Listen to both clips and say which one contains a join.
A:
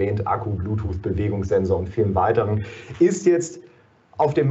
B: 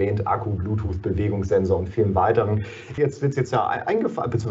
B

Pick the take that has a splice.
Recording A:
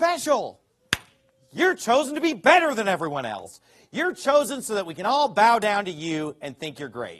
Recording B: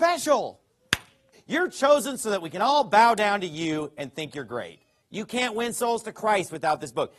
B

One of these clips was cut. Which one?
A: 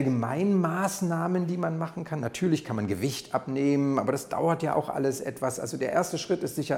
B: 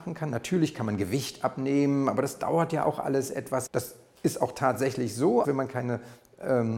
B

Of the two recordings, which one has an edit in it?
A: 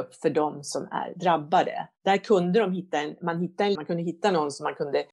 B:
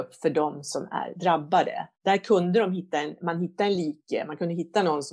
A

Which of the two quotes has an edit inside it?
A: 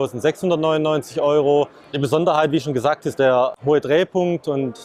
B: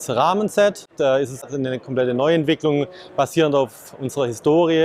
A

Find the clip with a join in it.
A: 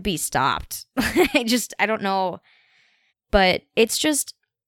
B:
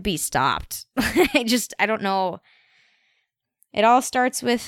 A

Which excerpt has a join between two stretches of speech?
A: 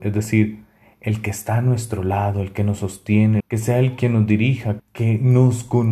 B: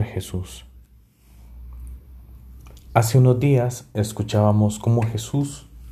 A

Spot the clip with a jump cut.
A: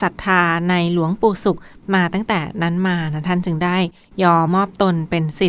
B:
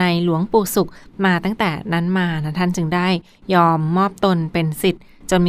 A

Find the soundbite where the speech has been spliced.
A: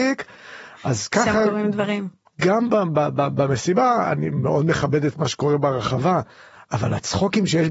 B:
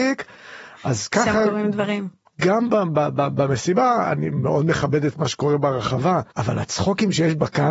B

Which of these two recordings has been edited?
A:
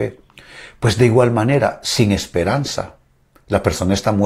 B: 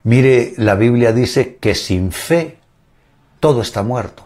B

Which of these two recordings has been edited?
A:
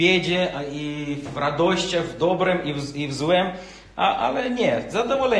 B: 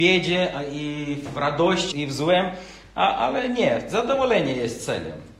B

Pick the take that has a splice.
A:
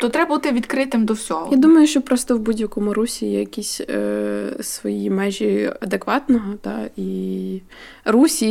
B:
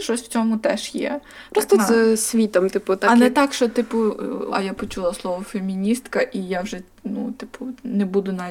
B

